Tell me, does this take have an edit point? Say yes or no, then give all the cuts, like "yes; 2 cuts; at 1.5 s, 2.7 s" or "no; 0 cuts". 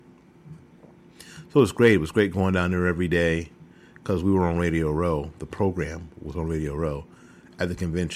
no; 0 cuts